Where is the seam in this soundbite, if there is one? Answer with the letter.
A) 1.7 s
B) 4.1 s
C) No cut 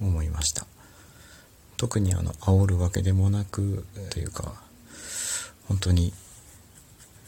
B